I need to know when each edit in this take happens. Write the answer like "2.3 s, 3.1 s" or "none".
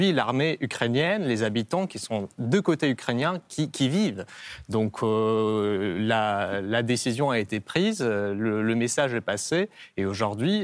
none